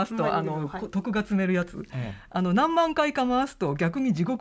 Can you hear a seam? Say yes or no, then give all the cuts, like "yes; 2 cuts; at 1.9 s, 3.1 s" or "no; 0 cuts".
no; 0 cuts